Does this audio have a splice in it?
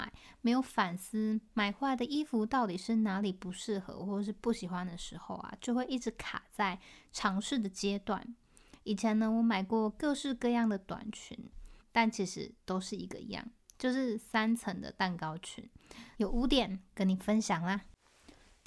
yes; 2 cuts; at 11.8 s, 16.1 s

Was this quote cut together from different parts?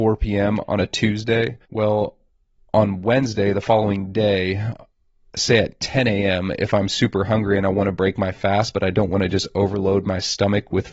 yes; 1 cut; at 1.6 s

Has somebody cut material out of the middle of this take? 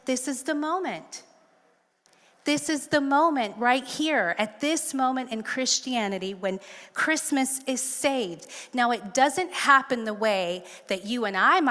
no; 0 cuts

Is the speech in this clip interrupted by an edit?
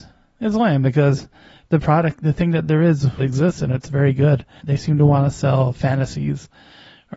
yes; 2 cuts; at 3.2 s, 4.6 s

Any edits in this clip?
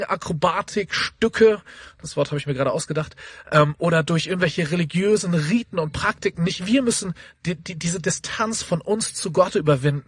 no; 0 cuts

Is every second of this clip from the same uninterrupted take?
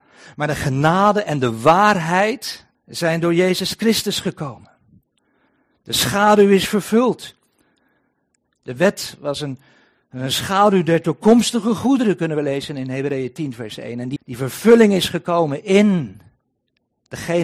no; 2 cuts; at 2.7 s, 14.2 s

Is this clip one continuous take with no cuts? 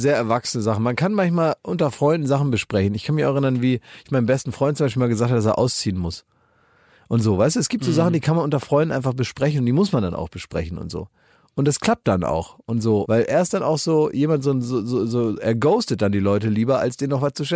no; 1 cut; at 13.0 s

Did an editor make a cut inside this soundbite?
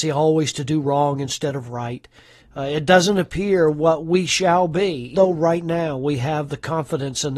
yes; 2 cuts; at 2.4 s, 5.1 s

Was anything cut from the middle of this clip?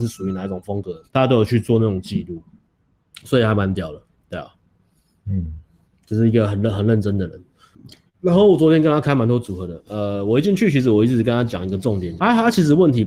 yes; 3 cuts; at 1.0 s, 9.0 s, 12.2 s

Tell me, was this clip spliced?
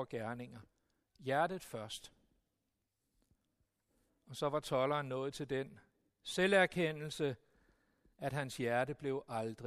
no; 0 cuts

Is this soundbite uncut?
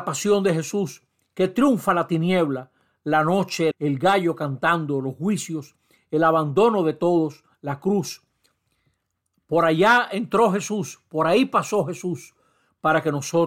no; 1 cut; at 3.7 s

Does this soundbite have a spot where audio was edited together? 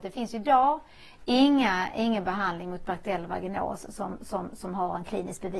no; 0 cuts

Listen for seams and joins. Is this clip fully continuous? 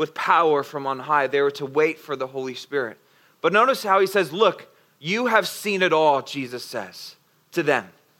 yes; 0 cuts

